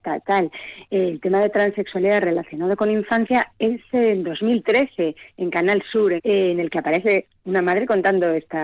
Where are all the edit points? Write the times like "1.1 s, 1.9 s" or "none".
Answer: 6.2 s